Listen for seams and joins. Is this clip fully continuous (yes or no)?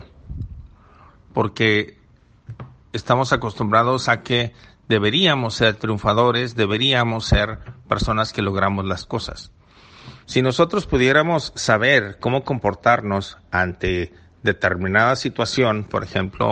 no